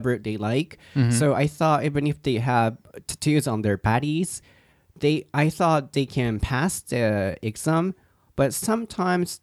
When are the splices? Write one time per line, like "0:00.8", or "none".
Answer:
none